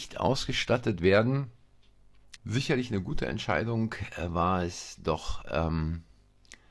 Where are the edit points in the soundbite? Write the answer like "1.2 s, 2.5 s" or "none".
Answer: 2.4 s

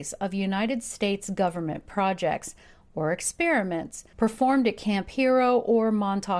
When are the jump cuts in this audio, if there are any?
none

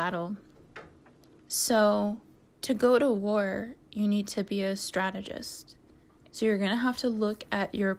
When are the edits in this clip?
1.4 s, 6.3 s

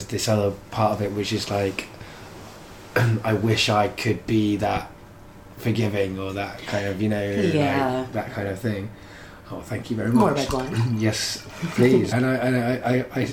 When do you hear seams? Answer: 12.1 s

